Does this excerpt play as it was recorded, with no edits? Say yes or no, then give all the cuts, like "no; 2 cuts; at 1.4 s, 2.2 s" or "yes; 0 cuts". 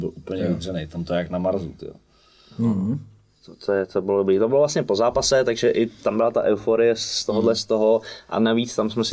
yes; 0 cuts